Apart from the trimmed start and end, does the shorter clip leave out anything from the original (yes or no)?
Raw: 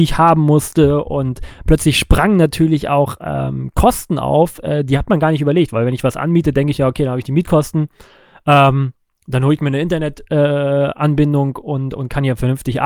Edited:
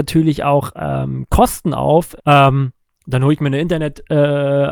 yes